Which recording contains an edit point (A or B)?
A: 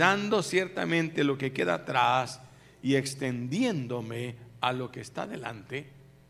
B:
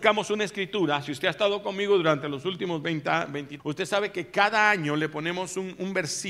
B